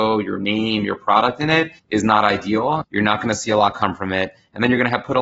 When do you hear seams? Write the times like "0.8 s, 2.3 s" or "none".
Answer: 1.8 s, 2.8 s